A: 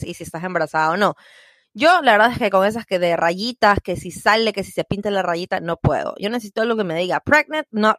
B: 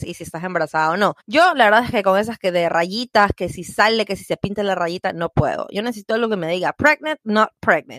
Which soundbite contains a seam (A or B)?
B